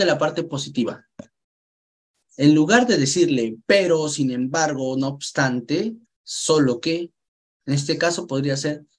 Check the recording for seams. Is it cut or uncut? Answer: cut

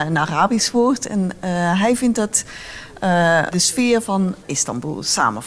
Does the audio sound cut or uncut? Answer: cut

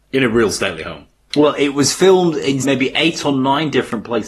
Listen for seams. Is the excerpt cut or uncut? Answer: cut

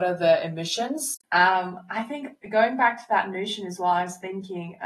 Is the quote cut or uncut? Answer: cut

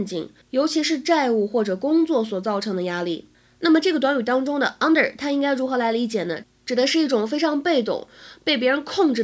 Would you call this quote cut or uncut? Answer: uncut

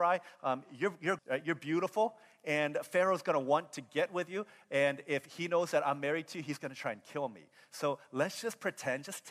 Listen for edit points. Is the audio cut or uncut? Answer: cut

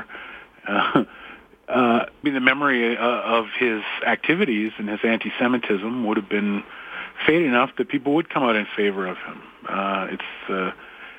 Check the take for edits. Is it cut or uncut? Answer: cut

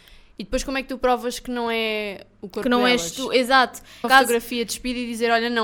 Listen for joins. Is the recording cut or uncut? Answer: cut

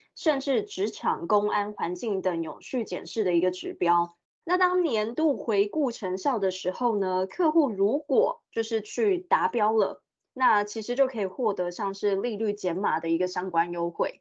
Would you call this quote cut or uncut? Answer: uncut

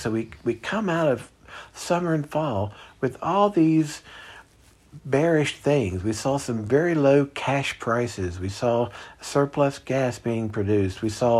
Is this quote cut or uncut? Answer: uncut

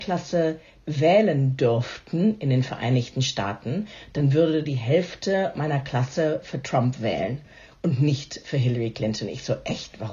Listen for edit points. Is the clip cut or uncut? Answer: uncut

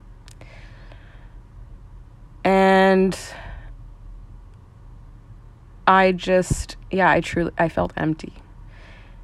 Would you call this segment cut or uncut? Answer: uncut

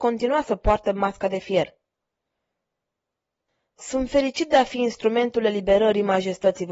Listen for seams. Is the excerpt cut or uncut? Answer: uncut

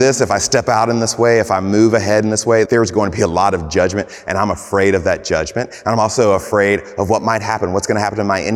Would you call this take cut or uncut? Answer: cut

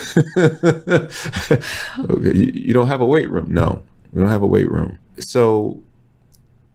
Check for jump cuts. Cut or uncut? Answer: cut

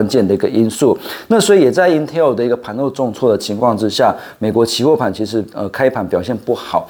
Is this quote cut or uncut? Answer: uncut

